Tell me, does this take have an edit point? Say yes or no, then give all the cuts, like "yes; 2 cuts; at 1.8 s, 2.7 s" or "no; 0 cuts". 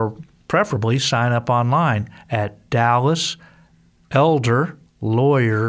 no; 0 cuts